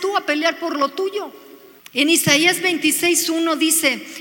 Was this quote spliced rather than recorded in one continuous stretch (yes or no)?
yes